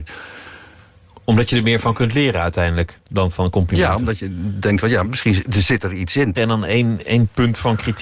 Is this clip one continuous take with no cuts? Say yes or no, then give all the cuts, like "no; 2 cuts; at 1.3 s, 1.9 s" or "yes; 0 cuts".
no; 2 cuts; at 5.0 s, 6.3 s